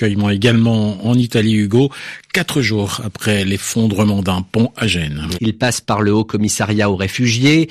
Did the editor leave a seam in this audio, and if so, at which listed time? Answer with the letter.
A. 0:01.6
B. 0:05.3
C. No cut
B